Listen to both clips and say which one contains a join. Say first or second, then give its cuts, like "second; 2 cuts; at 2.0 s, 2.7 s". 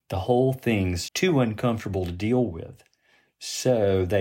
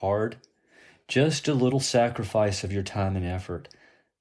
first; 1 cut; at 1.1 s